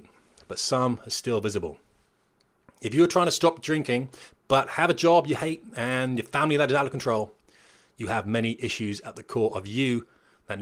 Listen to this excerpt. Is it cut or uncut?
uncut